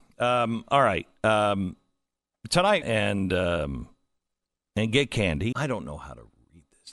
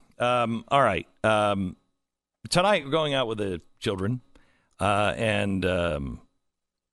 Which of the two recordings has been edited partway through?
first; 2 cuts; at 2.8 s, 5.5 s

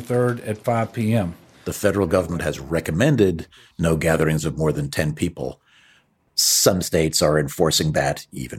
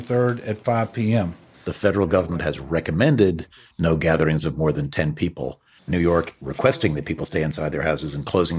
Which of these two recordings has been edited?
second; 1 cut; at 5.8 s

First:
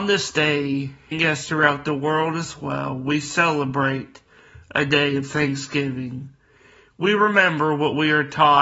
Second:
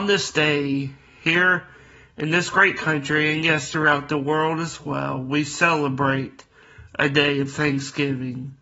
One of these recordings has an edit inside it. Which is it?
first; 1 cut; at 1.1 s

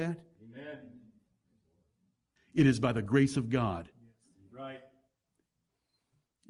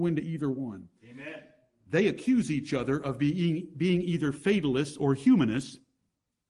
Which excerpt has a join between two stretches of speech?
first; 1 cut; at 2.4 s

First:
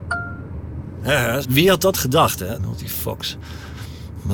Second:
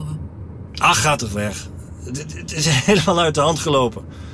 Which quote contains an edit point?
first; 2 cuts; at 1.4 s, 2.6 s

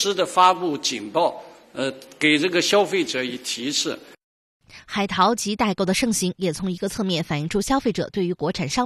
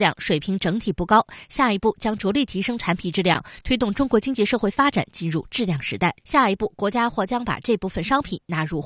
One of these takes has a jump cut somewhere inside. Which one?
second; 1 cut; at 6.2 s

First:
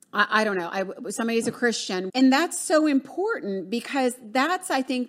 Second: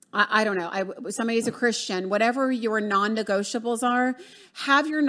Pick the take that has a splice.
first; 1 cut; at 2.1 s

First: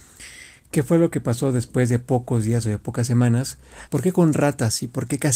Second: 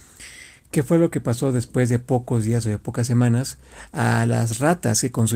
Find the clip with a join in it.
first; 1 cut; at 3.9 s

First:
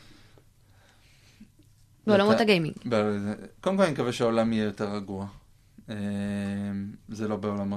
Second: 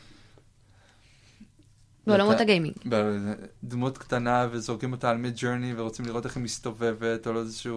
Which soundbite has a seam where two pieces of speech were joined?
second; 1 cut; at 3.6 s

